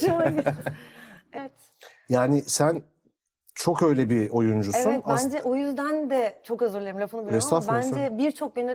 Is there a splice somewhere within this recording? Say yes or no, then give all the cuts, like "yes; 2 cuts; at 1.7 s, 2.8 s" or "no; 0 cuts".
yes; 1 cut; at 1.4 s